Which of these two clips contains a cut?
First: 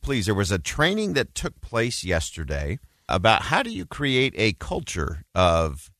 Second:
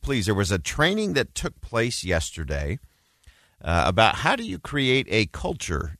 first; 1 cut; at 3.1 s

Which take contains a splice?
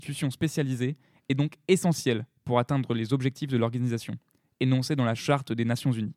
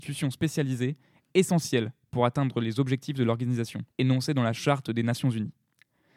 second; 2 cuts; at 1.3 s, 3.9 s

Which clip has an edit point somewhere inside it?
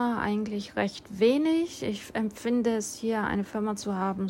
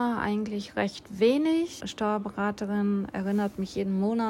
second; 1 cut; at 1.8 s

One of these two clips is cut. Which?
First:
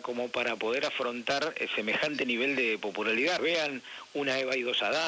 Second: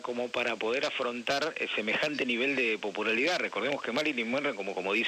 first; 1 cut; at 3.4 s

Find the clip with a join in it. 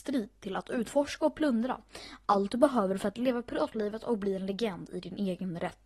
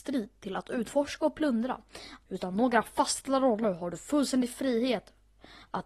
second; 1 cut; at 2.2 s

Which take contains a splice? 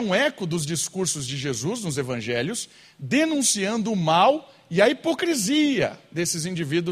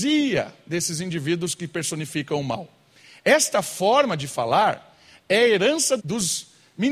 second; 1 cut; at 6.0 s

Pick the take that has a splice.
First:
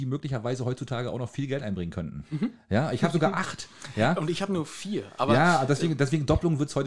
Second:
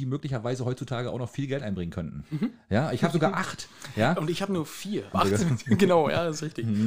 second; 1 cut; at 5.1 s

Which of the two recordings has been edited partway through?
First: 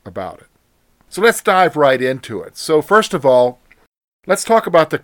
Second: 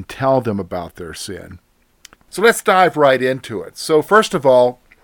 second; 1 cut; at 2.1 s

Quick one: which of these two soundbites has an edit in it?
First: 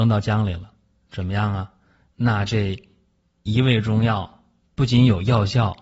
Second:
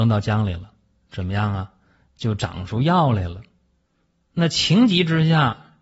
first; 1 cut; at 2.1 s

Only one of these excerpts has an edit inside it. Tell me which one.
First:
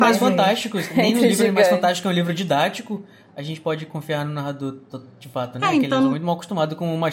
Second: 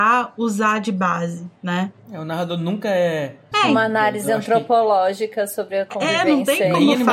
second; 1 cut; at 3.5 s

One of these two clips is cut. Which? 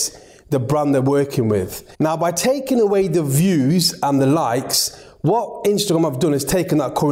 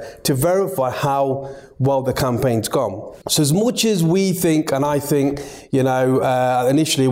first; 1 cut; at 1.9 s

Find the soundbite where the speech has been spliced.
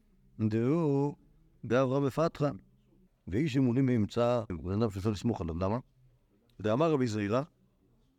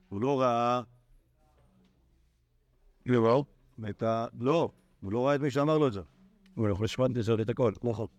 first; 2 cuts; at 3.1 s, 4.5 s

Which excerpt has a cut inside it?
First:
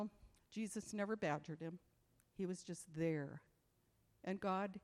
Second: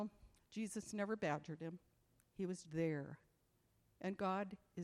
second; 1 cut; at 2.6 s

